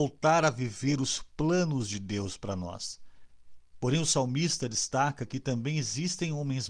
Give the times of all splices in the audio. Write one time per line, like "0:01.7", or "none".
0:03.7